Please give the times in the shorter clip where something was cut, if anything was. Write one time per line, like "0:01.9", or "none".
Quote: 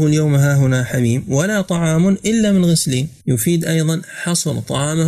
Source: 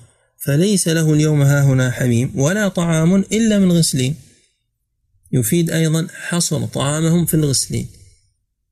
0:03.2